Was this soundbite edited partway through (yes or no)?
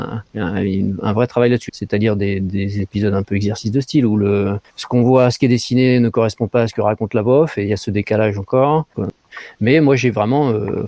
yes